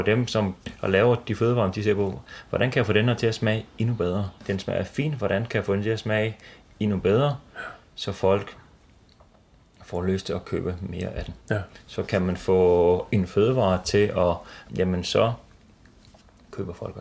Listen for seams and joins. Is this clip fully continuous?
no; 3 cuts; at 4.4 s, 11.4 s, 14.7 s

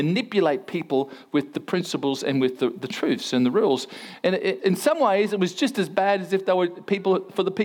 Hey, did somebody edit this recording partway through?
yes; 1 cut; at 4.6 s

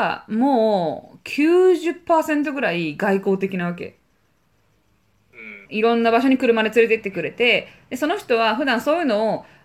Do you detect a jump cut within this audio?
yes; 1 cut; at 5.7 s

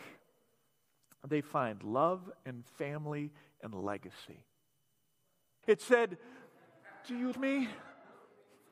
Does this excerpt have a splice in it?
yes; 2 cuts; at 5.6 s, 7.3 s

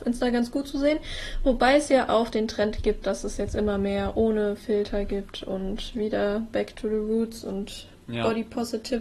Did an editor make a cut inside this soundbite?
no; 0 cuts

